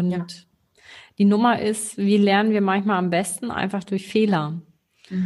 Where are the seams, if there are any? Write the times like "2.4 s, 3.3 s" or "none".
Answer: none